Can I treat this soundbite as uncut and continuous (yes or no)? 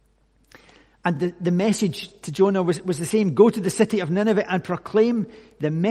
yes